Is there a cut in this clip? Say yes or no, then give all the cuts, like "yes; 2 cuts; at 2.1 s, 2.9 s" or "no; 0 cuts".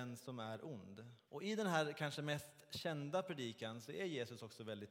yes; 1 cut; at 1.3 s